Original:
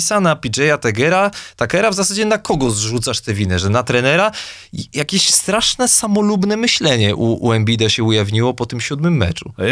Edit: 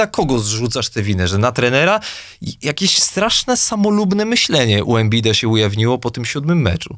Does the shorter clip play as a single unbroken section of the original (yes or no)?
no